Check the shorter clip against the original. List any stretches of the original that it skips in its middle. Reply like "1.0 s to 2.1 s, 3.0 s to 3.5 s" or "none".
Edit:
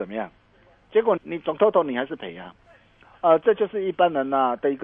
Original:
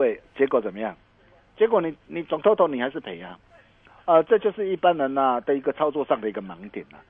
1.8 s to 2.0 s